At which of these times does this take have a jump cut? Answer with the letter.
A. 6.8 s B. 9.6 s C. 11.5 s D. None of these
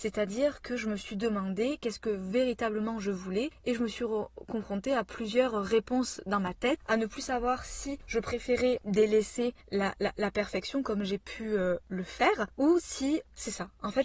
D